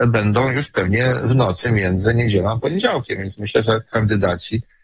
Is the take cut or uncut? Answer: uncut